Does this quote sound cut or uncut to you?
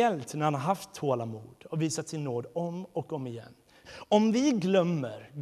cut